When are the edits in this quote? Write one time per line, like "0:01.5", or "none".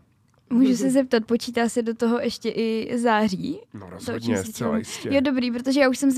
none